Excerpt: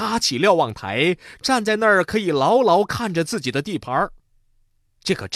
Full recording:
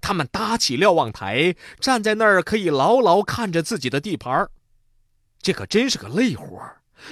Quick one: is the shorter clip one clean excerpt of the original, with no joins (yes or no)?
yes